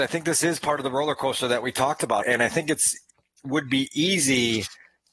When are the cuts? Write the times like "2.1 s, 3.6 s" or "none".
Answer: 2.2 s